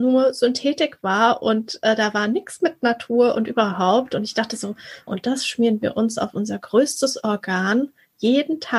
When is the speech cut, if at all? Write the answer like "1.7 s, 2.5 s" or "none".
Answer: 5.1 s